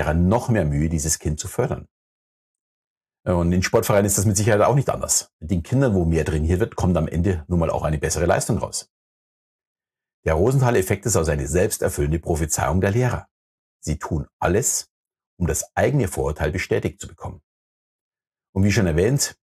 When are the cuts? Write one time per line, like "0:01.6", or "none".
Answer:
none